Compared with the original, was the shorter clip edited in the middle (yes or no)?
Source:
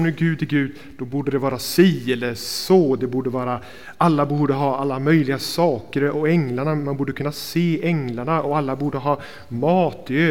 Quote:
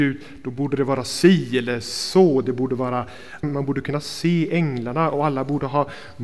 yes